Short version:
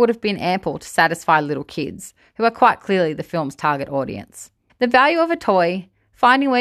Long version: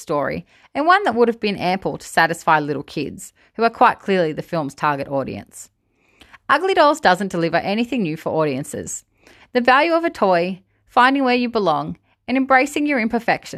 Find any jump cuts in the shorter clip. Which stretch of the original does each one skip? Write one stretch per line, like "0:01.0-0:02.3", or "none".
0:05.9-0:09.4